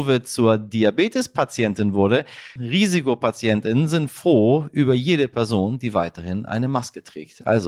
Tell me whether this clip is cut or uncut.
cut